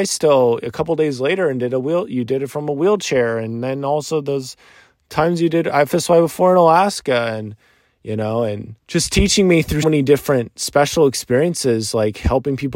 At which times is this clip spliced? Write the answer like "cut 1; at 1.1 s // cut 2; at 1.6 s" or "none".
cut 1; at 8.8 s // cut 2; at 9.8 s